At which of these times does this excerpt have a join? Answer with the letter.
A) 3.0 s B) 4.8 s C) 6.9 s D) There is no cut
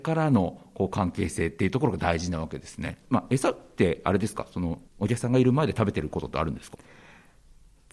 A